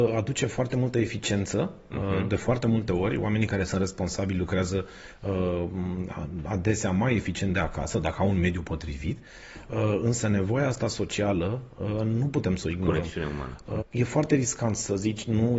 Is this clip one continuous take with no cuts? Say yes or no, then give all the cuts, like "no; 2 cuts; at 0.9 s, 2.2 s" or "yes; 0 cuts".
no; 1 cut; at 13.8 s